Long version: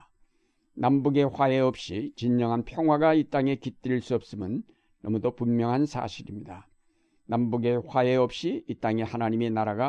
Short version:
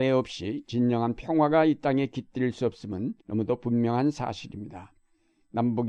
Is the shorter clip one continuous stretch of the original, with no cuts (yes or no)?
no